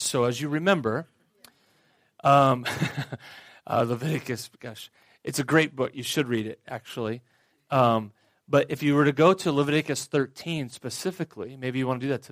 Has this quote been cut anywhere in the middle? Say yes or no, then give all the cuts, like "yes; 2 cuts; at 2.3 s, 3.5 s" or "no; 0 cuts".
no; 0 cuts